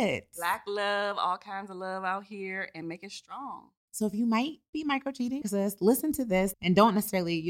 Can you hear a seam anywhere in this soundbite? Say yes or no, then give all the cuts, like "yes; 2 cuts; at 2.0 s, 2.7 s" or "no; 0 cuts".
yes; 2 cuts; at 5.4 s, 6.5 s